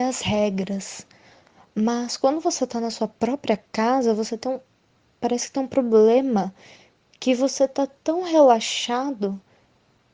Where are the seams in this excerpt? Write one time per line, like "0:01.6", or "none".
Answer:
none